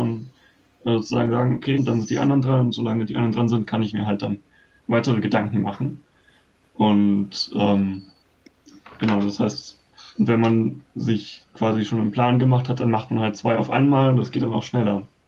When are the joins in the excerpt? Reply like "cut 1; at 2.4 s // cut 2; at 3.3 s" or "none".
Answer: cut 1; at 1.8 s